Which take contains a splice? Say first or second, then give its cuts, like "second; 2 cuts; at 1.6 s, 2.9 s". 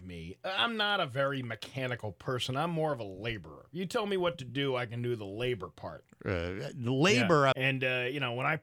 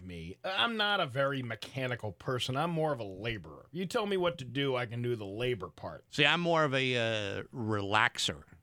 first; 2 cuts; at 6.0 s, 7.5 s